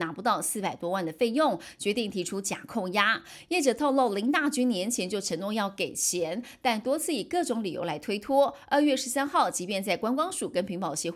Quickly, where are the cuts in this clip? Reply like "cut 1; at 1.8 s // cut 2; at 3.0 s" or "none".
none